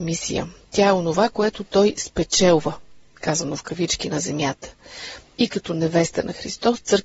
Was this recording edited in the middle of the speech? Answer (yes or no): no